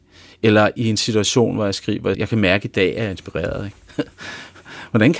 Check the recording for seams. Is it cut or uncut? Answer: cut